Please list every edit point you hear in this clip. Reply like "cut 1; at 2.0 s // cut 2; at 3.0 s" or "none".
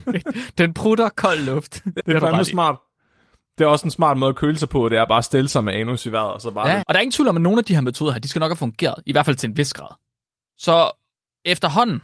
cut 1; at 2.0 s // cut 2; at 6.8 s // cut 3; at 10.4 s